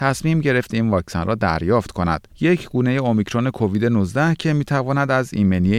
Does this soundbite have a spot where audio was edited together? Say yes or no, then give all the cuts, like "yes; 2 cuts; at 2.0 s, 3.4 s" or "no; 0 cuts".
yes; 1 cut; at 2.3 s